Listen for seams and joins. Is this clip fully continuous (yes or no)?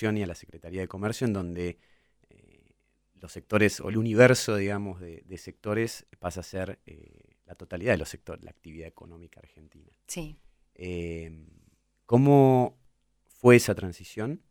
yes